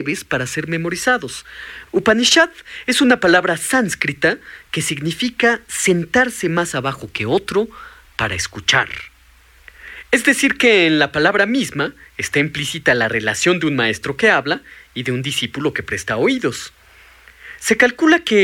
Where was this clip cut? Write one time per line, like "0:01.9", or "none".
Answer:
0:01.9